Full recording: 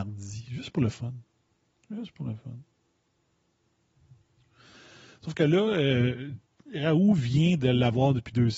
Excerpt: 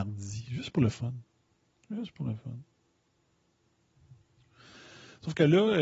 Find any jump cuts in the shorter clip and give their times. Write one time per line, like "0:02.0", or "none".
none